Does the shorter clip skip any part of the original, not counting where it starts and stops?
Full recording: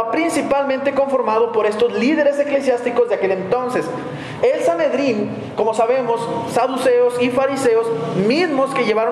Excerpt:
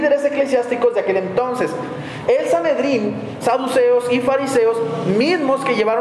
yes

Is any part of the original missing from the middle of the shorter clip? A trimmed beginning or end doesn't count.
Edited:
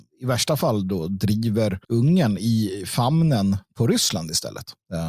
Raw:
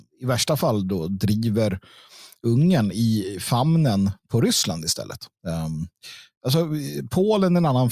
yes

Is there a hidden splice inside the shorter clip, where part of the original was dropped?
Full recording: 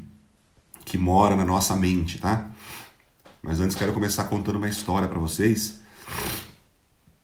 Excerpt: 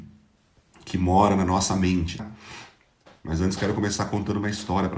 yes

